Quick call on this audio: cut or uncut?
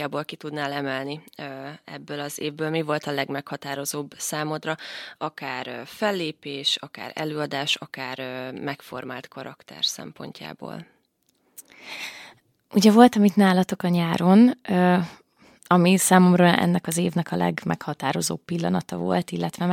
uncut